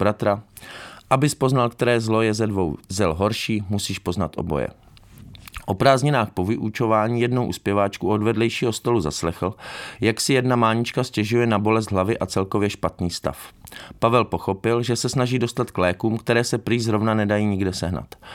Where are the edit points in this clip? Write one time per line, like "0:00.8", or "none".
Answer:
none